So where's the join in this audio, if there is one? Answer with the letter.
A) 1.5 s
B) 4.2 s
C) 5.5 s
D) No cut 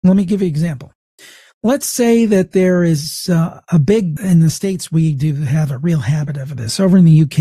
B